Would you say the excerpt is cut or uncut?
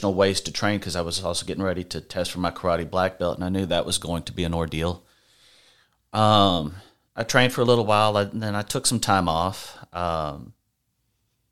cut